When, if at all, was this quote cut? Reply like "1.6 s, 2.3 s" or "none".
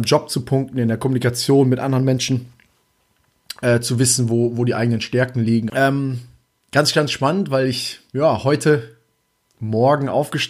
5.7 s